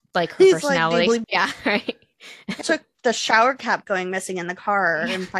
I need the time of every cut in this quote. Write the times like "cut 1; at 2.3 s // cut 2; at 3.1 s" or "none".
cut 1; at 1.2 s // cut 2; at 2.6 s